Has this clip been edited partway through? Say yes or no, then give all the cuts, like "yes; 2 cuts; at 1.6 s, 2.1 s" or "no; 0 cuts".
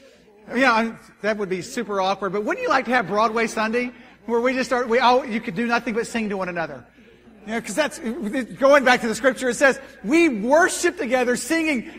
no; 0 cuts